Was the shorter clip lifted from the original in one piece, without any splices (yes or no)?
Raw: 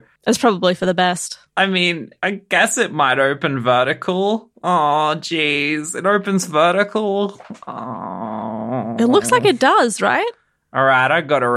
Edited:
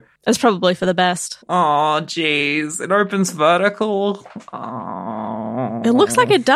no